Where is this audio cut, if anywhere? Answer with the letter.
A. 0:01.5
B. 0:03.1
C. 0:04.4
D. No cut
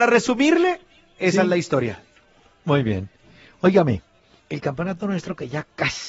C